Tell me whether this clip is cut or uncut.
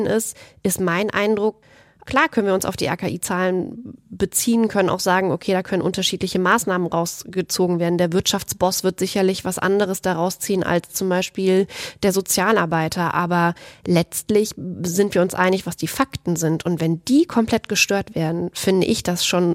uncut